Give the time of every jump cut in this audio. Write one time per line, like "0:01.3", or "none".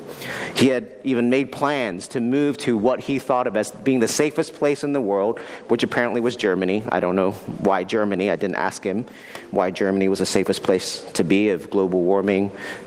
none